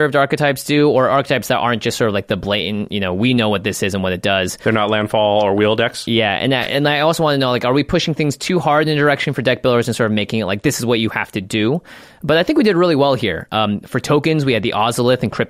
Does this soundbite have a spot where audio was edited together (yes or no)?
no